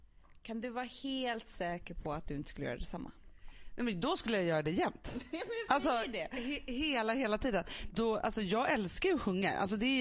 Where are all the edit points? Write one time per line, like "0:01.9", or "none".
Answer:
0:07.9